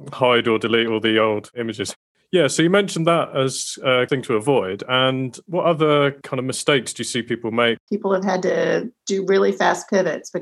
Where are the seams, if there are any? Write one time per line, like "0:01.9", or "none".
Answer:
0:07.9
0:09.0